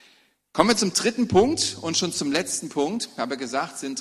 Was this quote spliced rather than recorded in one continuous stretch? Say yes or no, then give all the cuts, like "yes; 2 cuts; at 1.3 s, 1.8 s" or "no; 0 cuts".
no; 0 cuts